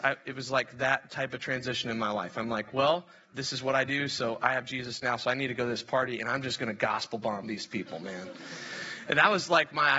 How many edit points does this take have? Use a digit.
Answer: 0